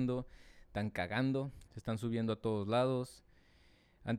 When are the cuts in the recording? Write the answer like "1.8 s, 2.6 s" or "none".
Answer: 1.7 s